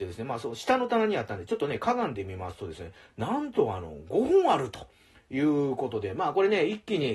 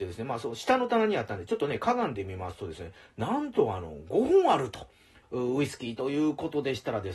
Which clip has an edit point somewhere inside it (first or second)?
second